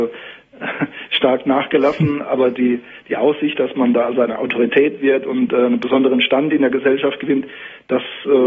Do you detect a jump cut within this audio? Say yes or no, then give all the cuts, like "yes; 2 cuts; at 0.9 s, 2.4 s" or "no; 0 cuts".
no; 0 cuts